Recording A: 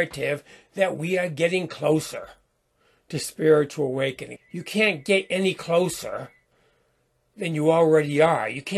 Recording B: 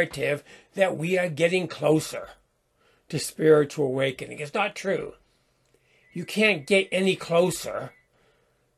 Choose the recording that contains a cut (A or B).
A